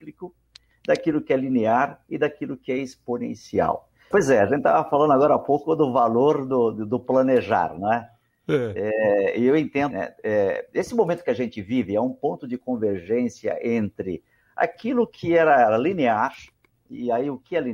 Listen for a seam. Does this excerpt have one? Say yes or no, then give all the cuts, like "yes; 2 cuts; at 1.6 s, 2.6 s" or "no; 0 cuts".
yes; 2 cuts; at 4.1 s, 9.9 s